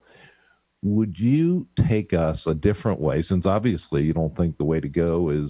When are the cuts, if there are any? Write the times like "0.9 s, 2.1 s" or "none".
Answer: none